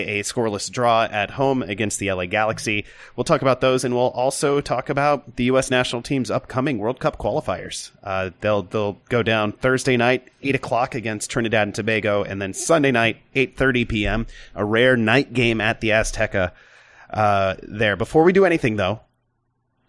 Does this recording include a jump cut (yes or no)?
no